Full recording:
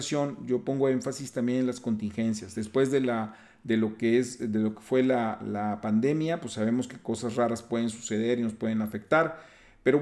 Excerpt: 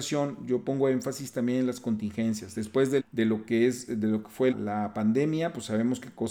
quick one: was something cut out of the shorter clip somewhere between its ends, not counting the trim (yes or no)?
yes